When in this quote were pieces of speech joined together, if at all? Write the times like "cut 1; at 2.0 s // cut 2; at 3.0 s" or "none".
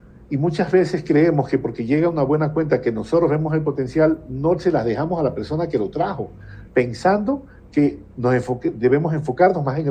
cut 1; at 6.7 s